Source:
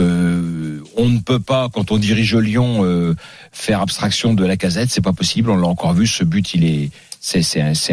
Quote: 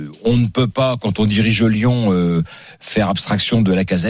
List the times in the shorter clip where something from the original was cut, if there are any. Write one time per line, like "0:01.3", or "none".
none